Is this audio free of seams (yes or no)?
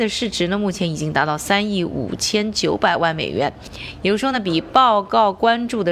yes